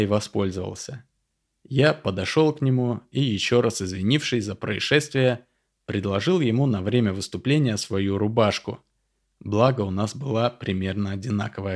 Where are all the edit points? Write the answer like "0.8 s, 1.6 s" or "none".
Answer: none